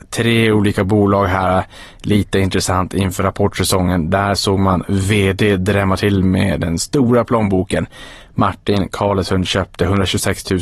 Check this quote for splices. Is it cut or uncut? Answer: uncut